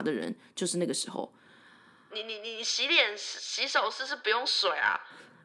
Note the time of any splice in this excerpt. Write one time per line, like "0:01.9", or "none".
0:02.1